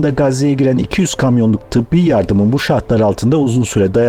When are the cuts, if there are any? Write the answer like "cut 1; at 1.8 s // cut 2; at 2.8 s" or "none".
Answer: none